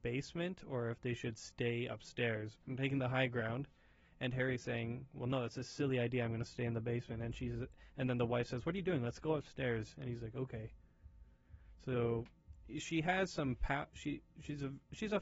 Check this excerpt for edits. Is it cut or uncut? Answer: cut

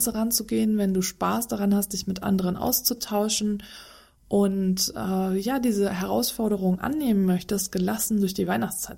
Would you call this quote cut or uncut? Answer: uncut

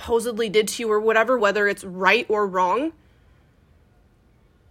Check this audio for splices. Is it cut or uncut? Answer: cut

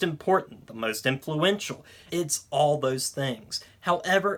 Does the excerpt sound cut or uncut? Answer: cut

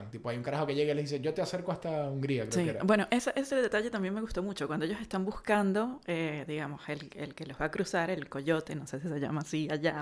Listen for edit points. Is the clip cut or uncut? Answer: uncut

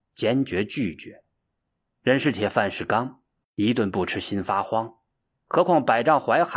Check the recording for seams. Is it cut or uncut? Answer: uncut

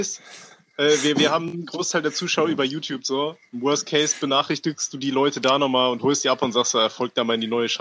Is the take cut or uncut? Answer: uncut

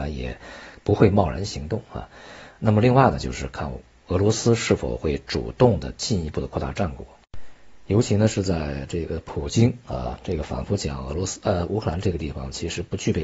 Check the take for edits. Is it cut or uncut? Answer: uncut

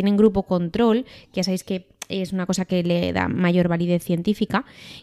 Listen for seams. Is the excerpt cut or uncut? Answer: uncut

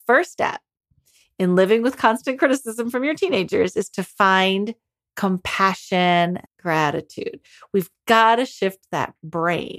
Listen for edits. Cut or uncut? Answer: cut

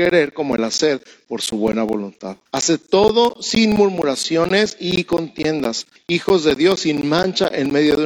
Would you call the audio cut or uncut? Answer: cut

